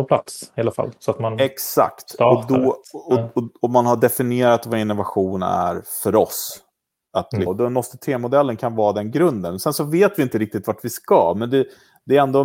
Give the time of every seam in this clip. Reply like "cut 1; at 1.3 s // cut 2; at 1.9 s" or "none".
cut 1; at 7.5 s